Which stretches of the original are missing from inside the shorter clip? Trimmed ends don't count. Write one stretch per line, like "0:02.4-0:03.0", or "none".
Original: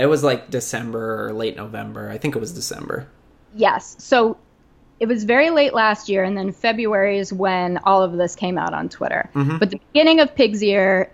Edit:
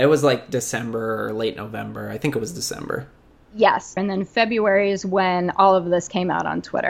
0:04.0-0:06.2